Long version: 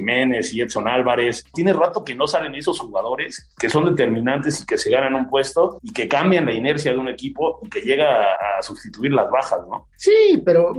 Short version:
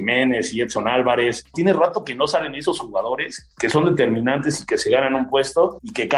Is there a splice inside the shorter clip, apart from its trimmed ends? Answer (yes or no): no